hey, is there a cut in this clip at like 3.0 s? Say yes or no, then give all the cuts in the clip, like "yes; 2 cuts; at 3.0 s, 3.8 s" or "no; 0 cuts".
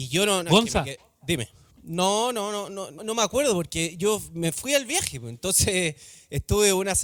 yes; 2 cuts; at 1.7 s, 3.0 s